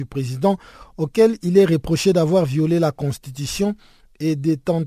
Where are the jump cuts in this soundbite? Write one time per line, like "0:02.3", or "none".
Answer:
none